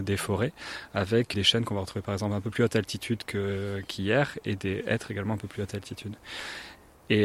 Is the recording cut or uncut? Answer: cut